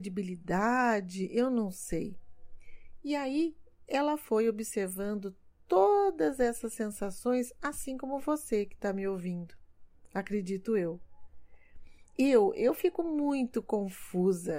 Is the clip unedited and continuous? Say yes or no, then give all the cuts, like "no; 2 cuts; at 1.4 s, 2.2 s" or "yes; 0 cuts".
yes; 0 cuts